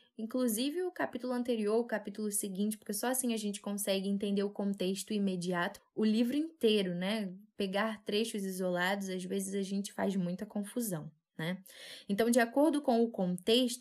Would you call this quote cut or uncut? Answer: cut